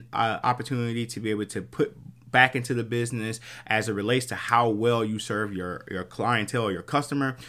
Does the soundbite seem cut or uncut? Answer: uncut